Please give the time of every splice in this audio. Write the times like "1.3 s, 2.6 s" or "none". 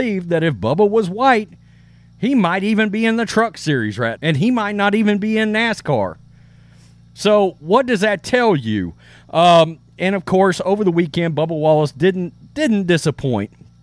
4.2 s